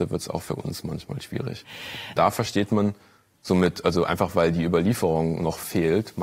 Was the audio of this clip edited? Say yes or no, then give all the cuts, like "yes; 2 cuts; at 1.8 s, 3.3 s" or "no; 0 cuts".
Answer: yes; 1 cut; at 2.2 s